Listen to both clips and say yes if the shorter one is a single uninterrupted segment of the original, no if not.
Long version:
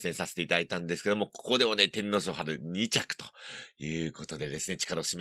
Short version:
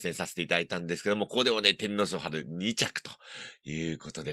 no